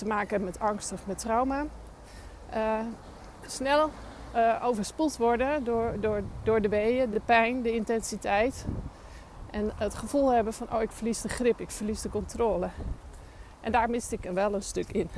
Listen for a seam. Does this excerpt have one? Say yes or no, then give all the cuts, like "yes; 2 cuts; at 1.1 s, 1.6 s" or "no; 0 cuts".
no; 0 cuts